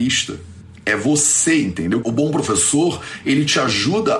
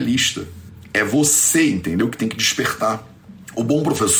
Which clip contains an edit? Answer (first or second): first